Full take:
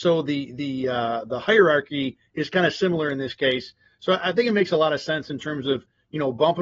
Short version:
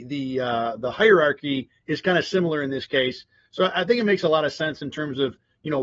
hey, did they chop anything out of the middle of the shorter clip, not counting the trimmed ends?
no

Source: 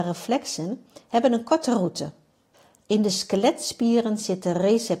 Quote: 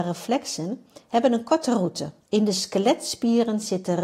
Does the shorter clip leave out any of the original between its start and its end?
yes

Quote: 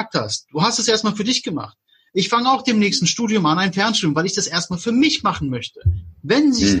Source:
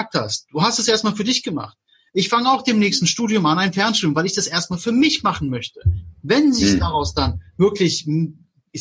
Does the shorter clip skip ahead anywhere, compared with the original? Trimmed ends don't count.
no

